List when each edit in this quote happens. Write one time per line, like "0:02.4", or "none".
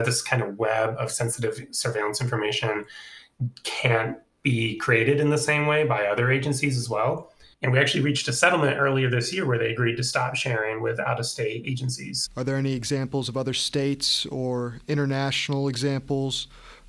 0:07.5
0:12.3